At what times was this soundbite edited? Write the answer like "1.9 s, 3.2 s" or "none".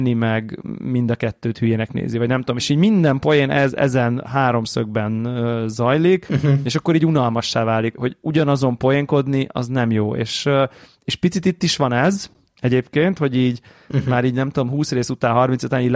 7.9 s